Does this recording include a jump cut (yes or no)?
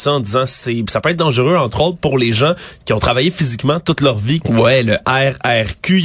yes